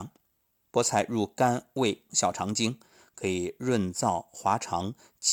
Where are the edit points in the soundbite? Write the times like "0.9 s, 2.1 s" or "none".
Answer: 2.1 s